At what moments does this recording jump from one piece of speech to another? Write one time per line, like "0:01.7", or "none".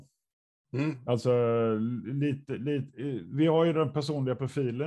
none

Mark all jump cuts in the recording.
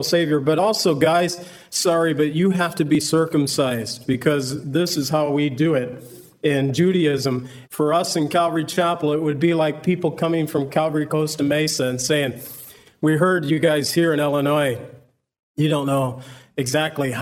0:07.6

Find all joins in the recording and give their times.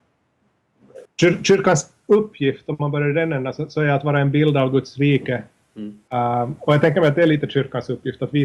0:01.1
0:06.1

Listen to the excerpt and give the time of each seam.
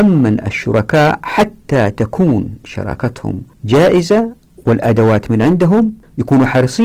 0:03.5

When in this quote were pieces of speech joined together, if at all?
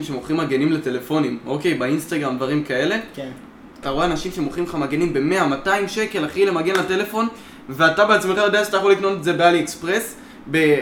0:03.8

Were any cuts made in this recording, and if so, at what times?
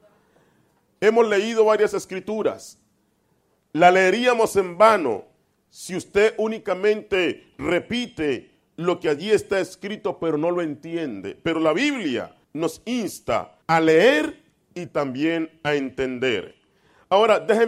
0:12.4
0:13.6

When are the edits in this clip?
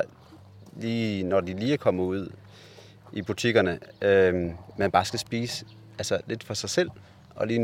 none

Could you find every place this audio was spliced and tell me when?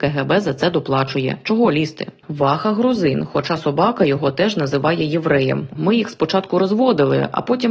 0:02.2
0:05.8

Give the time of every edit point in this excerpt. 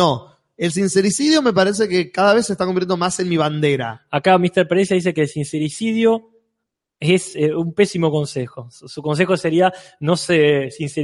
none

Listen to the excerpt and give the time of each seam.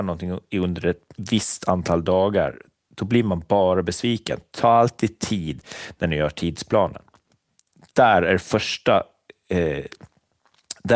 none

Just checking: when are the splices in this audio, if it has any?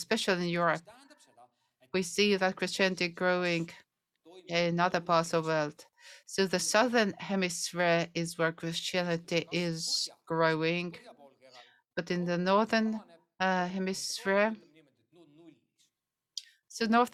none

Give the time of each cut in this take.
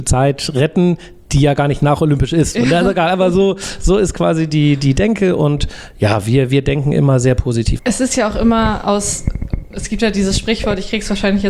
0:07.8

